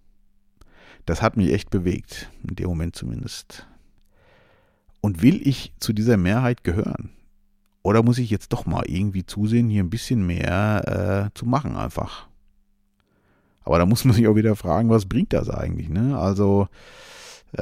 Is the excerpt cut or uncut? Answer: uncut